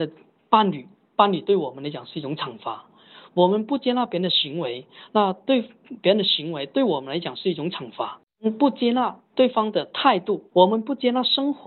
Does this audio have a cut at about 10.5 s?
yes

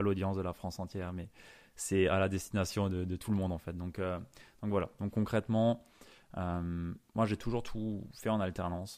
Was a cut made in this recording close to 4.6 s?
no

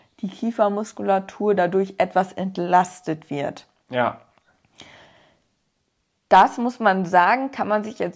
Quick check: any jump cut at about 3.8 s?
no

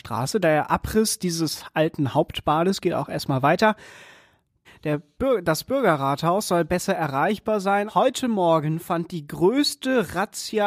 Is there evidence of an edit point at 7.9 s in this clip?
yes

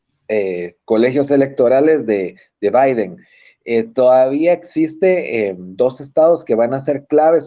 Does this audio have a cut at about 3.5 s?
no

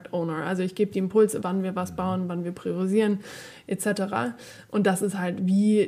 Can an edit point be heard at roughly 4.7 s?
no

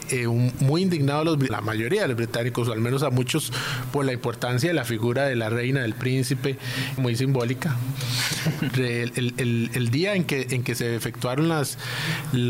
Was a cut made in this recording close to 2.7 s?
no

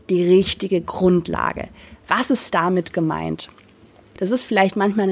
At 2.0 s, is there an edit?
no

